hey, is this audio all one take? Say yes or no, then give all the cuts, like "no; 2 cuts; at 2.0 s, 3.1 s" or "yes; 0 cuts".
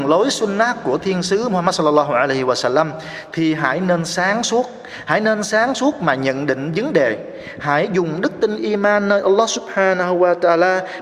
yes; 0 cuts